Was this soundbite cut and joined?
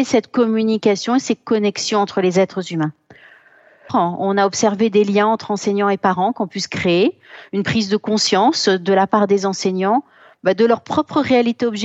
yes; 1 cut; at 3.9 s

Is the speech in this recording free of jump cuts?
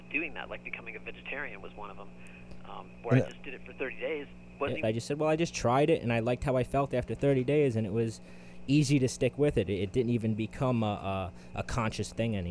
no; 1 cut; at 4.8 s

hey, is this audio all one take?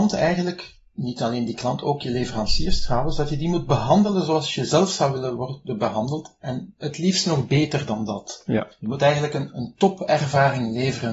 yes; 0 cuts

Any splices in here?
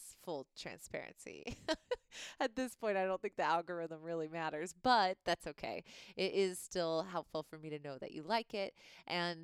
no; 0 cuts

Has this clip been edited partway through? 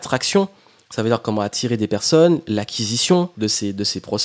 yes; 1 cut; at 3.3 s

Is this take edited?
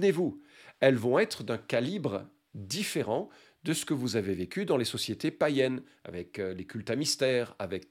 no; 0 cuts

